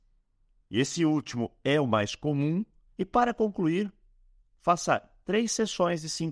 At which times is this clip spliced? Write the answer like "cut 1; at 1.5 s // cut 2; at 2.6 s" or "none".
cut 1; at 2.9 s